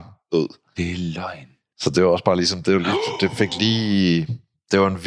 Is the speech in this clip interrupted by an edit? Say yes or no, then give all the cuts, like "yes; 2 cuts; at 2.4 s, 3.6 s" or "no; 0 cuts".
no; 0 cuts